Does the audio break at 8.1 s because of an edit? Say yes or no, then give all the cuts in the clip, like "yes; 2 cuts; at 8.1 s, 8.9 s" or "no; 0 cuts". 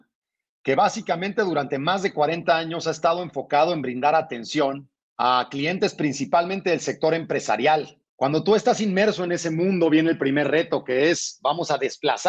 no; 0 cuts